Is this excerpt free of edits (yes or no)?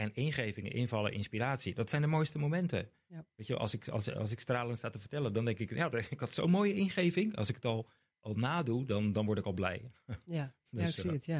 yes